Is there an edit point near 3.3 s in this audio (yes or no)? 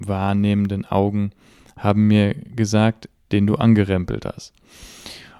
yes